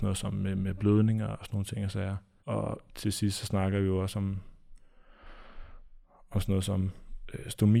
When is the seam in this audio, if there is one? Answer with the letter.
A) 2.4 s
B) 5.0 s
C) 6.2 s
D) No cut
A